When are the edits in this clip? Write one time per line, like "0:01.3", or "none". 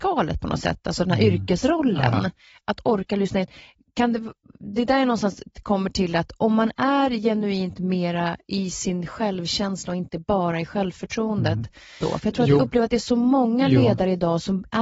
0:12.0